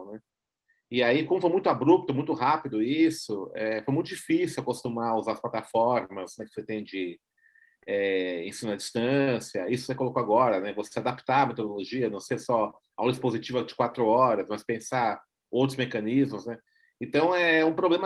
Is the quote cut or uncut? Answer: uncut